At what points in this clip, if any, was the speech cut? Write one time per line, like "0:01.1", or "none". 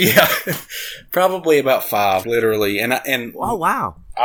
0:02.2

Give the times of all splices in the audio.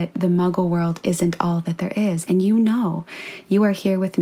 0:02.3

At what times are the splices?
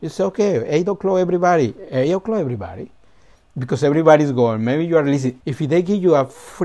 0:03.3
0:05.4

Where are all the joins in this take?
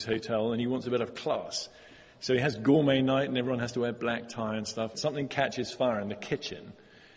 0:04.9

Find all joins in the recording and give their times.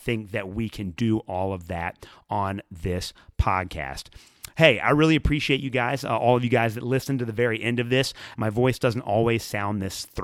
0:08.3

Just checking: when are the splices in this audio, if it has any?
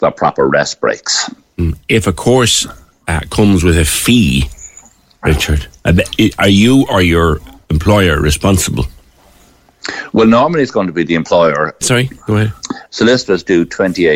0:11.8
0:12.9

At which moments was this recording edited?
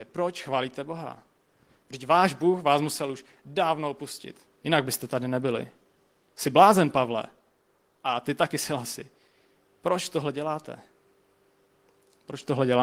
none

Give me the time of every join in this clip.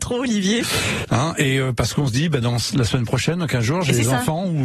0:01.0

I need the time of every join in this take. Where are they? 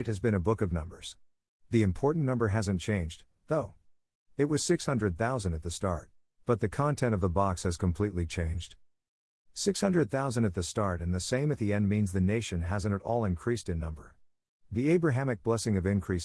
0:06.3

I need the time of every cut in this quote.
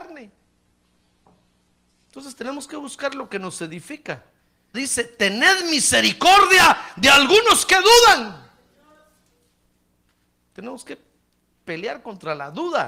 0:04.7

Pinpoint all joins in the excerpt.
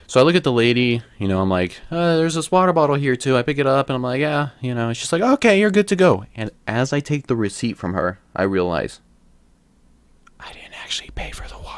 none

